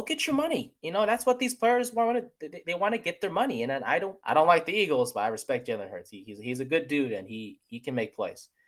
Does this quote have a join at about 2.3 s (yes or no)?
no